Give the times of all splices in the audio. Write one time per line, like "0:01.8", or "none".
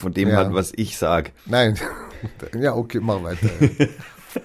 0:01.4